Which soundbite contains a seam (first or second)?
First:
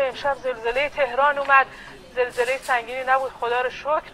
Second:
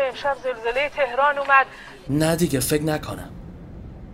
second